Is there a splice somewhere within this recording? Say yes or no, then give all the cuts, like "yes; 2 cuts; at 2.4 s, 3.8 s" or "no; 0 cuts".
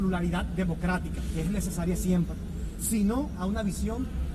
no; 0 cuts